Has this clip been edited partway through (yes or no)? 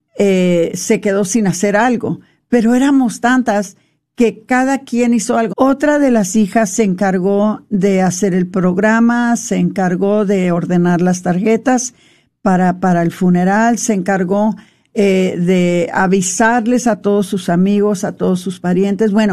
yes